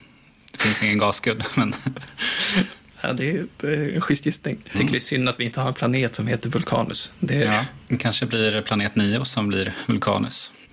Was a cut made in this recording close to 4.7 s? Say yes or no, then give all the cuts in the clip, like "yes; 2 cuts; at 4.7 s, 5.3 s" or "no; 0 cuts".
yes; 1 cut; at 4.7 s